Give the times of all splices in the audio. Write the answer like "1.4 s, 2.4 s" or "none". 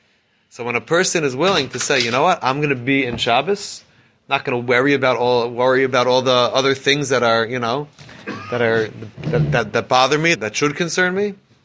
9.1 s, 10.3 s